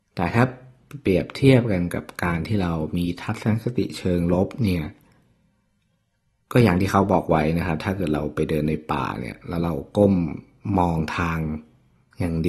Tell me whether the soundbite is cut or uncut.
uncut